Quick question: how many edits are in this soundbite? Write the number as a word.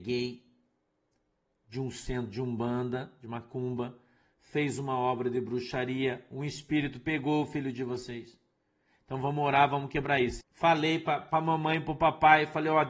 one